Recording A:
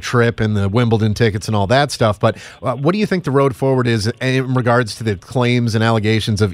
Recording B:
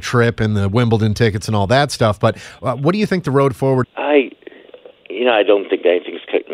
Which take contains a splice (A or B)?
B